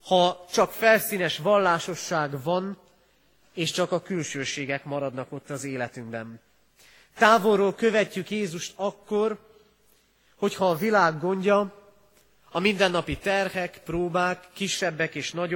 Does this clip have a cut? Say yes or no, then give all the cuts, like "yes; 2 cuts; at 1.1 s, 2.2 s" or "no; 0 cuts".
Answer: no; 0 cuts